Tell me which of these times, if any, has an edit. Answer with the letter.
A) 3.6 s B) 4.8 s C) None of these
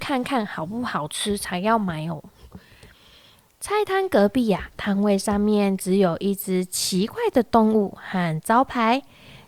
B